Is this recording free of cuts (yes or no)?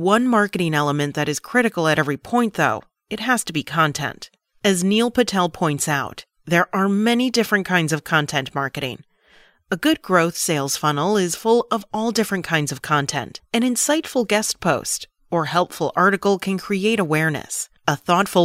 yes